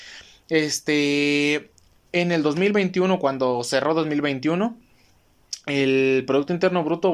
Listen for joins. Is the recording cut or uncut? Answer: uncut